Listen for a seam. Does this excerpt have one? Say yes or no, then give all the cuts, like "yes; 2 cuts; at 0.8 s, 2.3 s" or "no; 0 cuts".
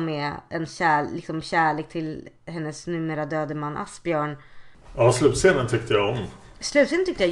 no; 0 cuts